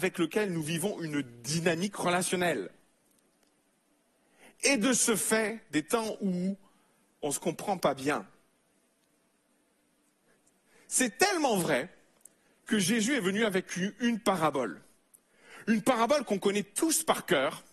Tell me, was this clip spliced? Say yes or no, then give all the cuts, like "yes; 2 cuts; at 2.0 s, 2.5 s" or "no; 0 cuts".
no; 0 cuts